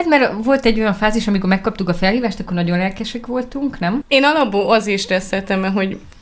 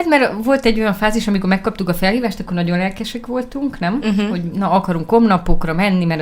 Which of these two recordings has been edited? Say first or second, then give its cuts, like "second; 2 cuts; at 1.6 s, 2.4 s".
first; 1 cut; at 4.0 s